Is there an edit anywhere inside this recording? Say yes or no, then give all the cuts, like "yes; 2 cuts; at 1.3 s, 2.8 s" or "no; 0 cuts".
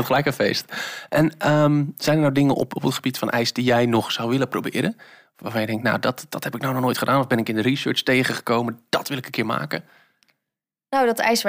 no; 0 cuts